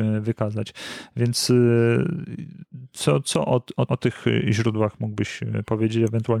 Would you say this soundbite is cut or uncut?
cut